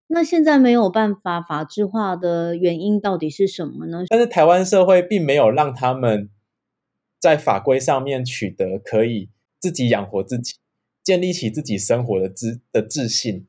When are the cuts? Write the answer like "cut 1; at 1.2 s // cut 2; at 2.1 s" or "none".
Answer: cut 1; at 4.1 s

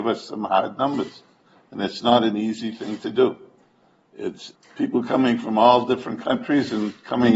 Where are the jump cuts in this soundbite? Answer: none

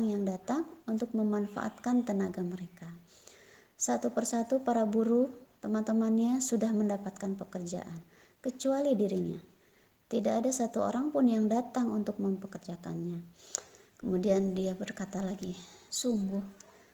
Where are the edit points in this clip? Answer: cut 1; at 15.9 s

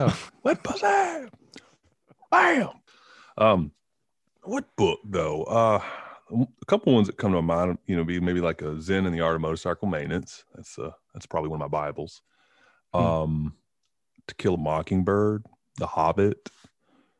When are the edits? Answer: none

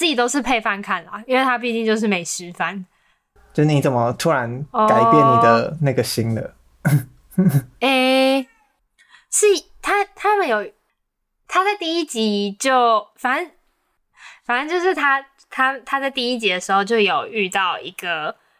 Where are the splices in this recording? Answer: cut 1; at 3.4 s // cut 2; at 7.8 s

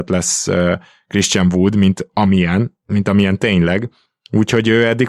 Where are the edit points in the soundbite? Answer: none

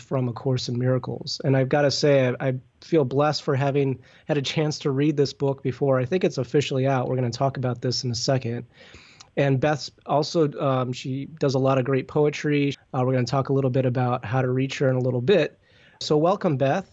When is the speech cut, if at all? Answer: cut 1; at 12.7 s // cut 2; at 16.0 s

